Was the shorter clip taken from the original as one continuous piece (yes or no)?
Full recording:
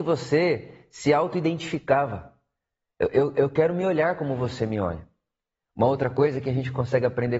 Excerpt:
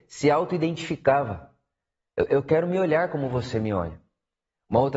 no